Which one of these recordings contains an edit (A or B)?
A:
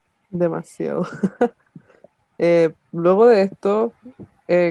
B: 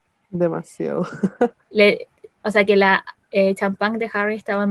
B